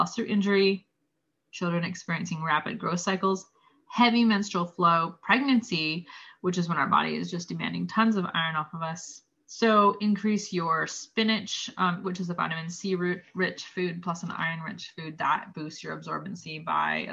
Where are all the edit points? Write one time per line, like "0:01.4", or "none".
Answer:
0:09.4
0:12.0